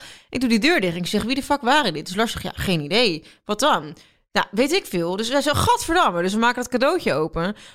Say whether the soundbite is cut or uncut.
uncut